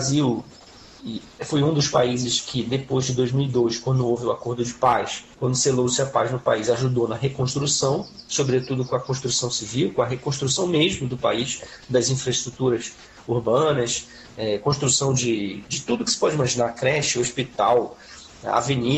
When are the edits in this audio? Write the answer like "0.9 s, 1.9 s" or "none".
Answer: 5.3 s